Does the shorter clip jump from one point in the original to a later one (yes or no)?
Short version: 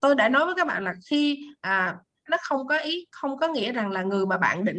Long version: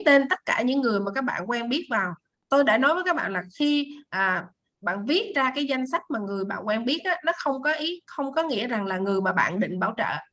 yes